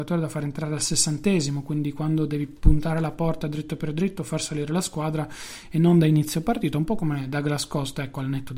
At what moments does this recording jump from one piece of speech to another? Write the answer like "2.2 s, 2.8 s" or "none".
none